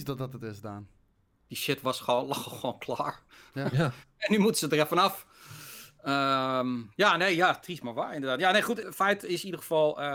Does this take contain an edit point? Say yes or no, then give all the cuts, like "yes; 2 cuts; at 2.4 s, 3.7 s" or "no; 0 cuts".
yes; 1 cut; at 8.8 s